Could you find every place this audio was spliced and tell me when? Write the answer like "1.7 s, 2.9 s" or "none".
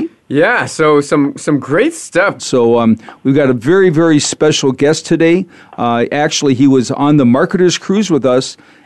2.4 s